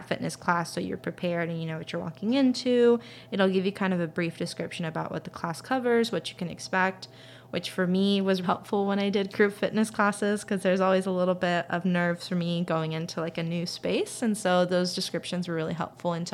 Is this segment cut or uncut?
cut